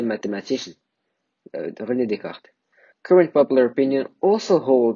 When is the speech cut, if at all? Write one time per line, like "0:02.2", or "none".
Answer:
0:02.9